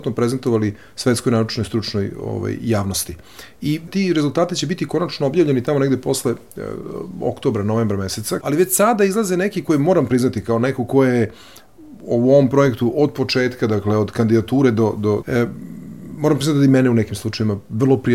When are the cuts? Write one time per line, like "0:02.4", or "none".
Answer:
0:08.4
0:15.2